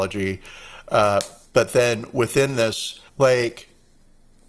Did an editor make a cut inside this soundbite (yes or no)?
yes